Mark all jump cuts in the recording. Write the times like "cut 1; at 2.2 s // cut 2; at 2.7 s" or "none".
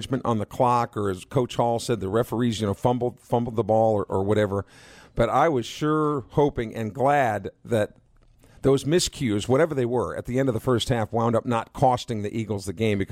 none